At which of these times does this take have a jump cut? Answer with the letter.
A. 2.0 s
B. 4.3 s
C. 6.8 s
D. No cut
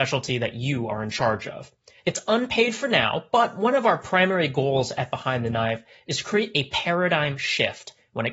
A